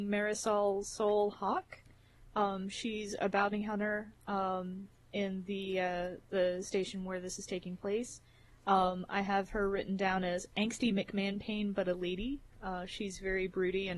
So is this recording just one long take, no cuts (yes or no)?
yes